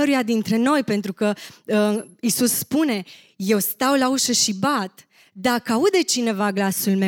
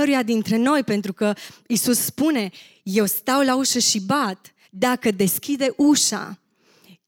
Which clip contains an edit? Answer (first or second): second